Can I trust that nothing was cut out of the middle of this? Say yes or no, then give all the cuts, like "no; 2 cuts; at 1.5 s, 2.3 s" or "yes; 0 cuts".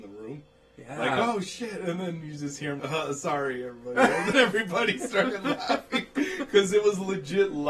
no; 2 cuts; at 2.8 s, 4.3 s